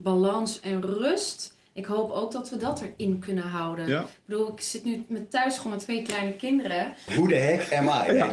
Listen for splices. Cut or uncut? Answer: cut